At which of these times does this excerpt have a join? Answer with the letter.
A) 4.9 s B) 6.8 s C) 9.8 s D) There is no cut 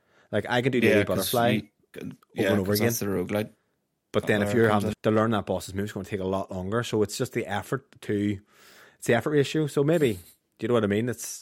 A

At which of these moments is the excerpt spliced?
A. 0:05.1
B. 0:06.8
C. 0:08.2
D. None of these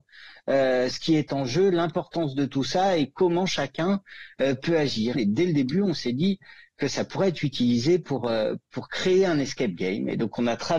A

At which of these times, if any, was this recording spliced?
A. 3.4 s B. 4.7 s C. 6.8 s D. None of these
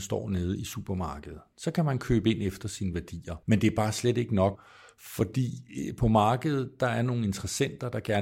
A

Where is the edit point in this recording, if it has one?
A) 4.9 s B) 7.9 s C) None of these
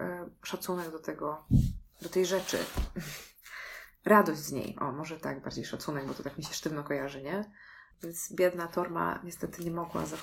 B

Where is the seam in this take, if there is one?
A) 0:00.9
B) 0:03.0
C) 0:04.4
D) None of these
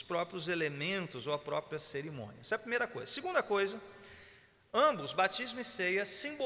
D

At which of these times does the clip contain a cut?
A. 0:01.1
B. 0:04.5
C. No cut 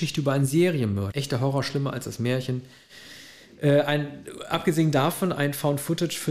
A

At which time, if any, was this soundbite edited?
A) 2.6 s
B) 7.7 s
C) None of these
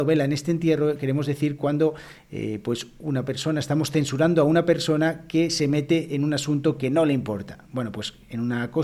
C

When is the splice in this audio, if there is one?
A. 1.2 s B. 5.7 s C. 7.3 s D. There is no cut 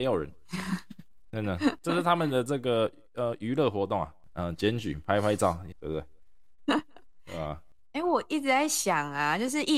B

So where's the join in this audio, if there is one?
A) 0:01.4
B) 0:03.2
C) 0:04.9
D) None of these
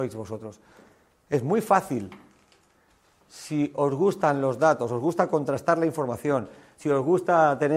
D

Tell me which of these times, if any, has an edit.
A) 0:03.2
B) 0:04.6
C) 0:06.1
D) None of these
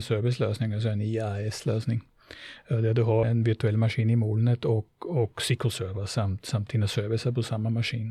A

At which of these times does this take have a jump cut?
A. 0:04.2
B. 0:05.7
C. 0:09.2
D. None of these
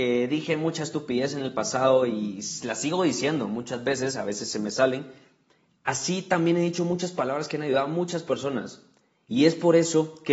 B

